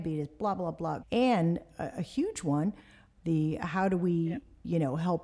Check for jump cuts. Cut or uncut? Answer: cut